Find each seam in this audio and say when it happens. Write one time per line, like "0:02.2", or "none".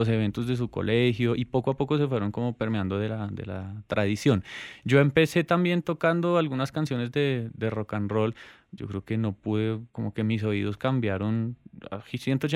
0:08.8
0:09.9